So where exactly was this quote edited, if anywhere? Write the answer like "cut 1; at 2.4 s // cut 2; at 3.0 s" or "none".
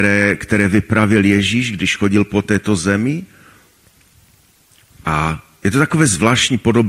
none

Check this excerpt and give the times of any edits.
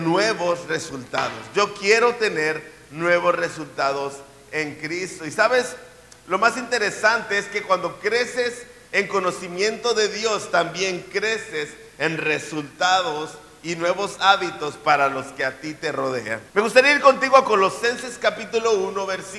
cut 1; at 16.5 s

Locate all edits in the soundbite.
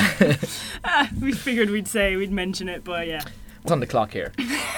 cut 1; at 3.7 s

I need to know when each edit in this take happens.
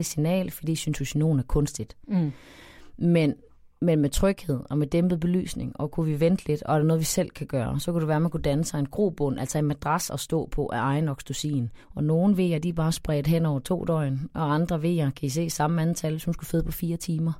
cut 1; at 11.8 s

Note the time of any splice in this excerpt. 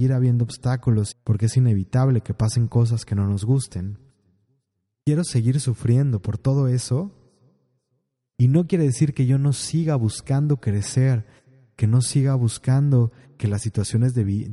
cut 1; at 1.1 s // cut 2; at 5.0 s // cut 3; at 8.3 s

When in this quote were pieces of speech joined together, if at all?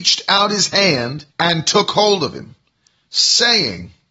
cut 1; at 1.3 s

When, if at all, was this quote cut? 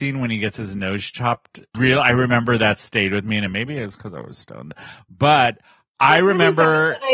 cut 1; at 1.7 s

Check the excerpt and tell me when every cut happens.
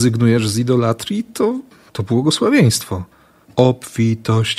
none

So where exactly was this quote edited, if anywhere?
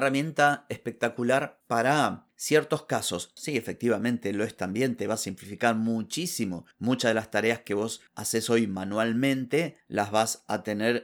cut 1; at 3.4 s

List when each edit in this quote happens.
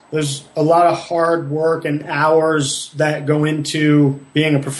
none

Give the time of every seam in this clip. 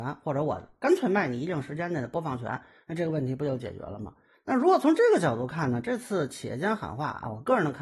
cut 1; at 4.3 s

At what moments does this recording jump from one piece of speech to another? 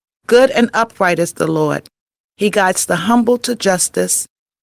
cut 1; at 2.2 s

